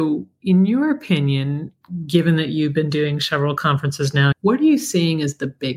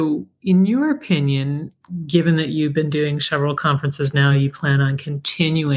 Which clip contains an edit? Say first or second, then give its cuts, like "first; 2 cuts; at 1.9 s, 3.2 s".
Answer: first; 1 cut; at 4.3 s